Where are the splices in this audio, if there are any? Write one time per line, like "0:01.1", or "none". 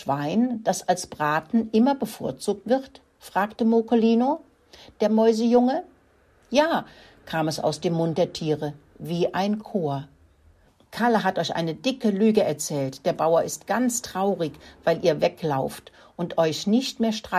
none